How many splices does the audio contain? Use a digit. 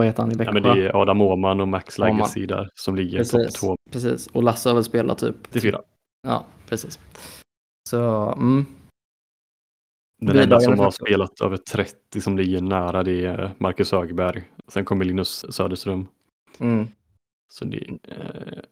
3